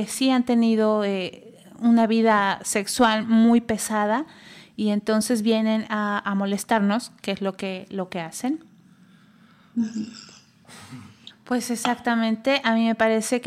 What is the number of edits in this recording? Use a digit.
1